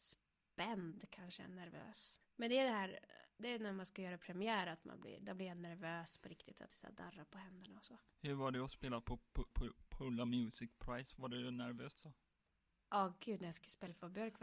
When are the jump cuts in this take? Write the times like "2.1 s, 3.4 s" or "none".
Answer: 2.2 s, 8.1 s, 9.5 s